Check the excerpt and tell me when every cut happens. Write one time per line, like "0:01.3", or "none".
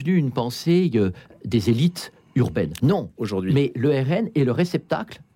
0:02.8